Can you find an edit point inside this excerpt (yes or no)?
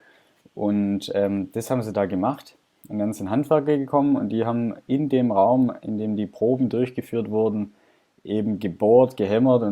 no